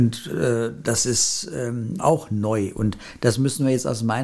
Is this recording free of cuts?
no; 1 cut; at 2.0 s

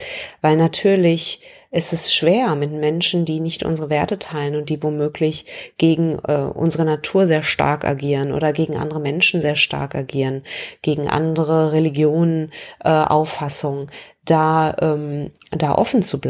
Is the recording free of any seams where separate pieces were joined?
yes; 0 cuts

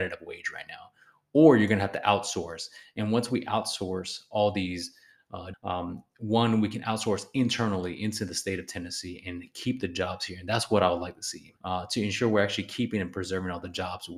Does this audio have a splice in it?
yes; 2 cuts; at 5.5 s, 11.6 s

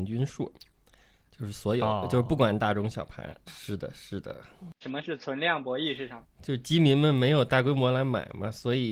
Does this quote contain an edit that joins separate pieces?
yes; 2 cuts; at 3.5 s, 4.8 s

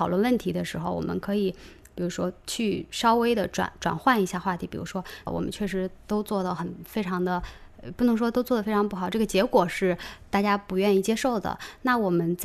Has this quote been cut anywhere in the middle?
yes; 1 cut; at 5.3 s

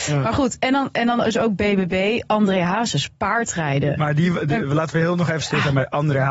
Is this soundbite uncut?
yes; 0 cuts

